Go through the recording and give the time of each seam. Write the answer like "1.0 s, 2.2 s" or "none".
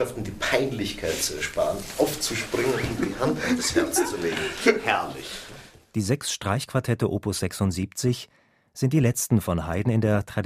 none

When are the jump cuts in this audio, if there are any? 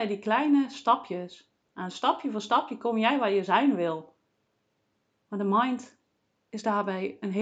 none

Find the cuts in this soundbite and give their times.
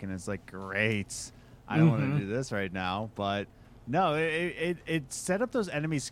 none

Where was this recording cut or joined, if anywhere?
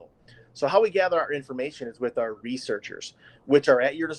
none

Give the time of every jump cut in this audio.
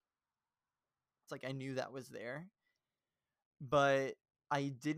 1.3 s

